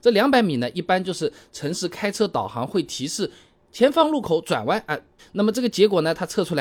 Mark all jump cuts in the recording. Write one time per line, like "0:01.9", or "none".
0:05.2